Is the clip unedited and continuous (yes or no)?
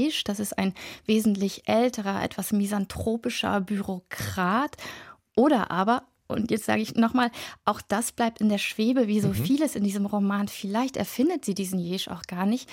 yes